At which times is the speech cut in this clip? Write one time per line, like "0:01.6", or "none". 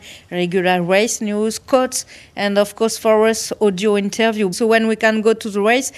0:04.5